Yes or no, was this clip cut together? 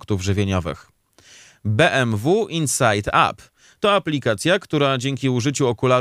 no